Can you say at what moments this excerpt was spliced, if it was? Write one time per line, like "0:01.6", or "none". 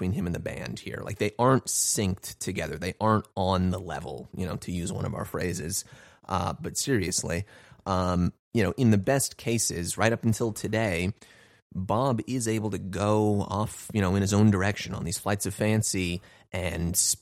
none